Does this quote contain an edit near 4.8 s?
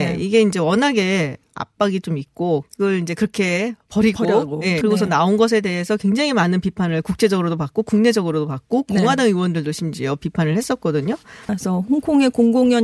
yes; 3 cuts; at 2.6 s, 4.8 s, 11.5 s

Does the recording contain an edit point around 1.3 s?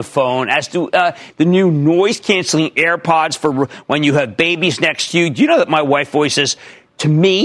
yes; 1 cut; at 1.3 s

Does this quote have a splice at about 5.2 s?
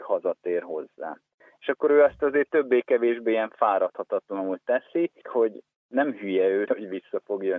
yes; 2 cuts; at 5.2 s, 6.7 s

